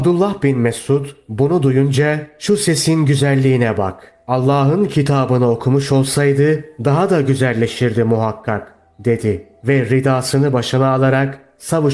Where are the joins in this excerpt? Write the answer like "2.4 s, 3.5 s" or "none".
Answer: none